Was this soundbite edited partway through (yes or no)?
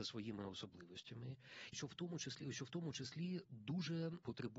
yes